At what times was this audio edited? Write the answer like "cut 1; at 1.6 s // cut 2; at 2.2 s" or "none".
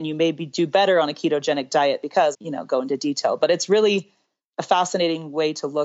cut 1; at 2.3 s